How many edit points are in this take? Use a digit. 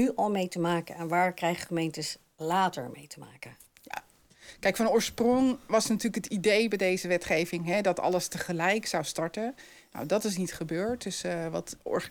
0